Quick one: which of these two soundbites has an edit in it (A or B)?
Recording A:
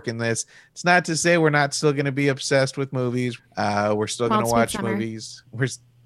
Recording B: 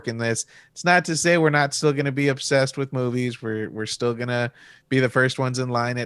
A